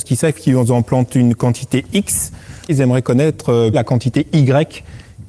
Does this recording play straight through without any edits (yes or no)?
no